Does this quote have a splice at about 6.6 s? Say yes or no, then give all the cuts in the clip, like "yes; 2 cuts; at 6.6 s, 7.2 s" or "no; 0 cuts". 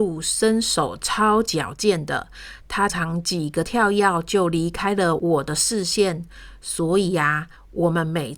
no; 1 cut; at 2.9 s